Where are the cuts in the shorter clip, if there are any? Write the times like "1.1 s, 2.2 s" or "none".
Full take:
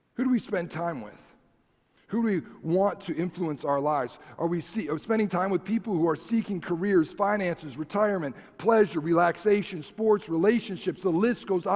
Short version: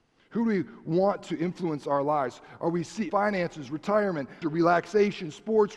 3.1 s, 4.4 s